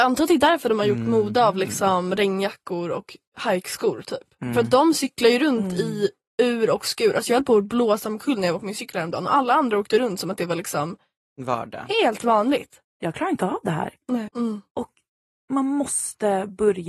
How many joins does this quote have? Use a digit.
2